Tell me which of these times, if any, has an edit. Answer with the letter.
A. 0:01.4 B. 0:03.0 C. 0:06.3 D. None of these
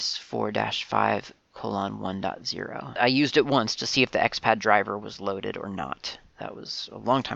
B